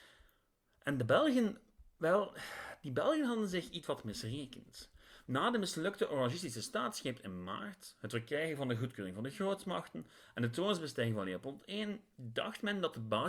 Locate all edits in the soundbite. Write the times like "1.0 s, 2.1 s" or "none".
none